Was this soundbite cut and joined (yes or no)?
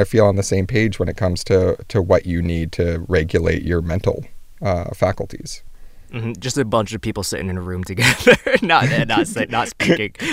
no